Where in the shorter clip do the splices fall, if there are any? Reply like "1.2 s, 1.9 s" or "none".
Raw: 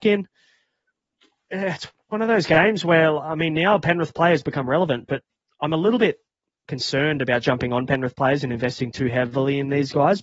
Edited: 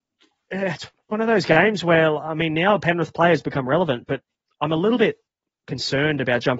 none